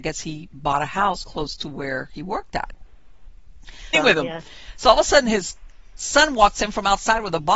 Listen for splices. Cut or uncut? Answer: cut